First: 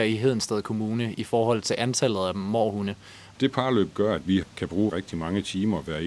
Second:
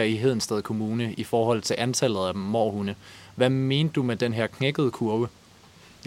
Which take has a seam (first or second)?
first